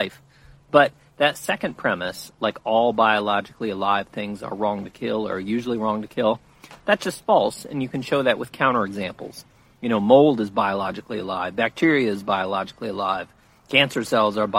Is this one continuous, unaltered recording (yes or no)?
yes